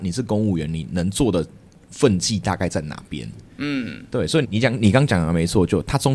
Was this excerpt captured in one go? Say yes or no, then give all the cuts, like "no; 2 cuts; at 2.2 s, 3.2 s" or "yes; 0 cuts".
no; 1 cut; at 4.4 s